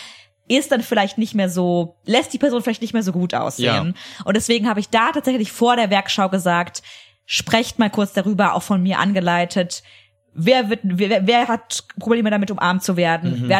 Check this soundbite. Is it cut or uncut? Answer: uncut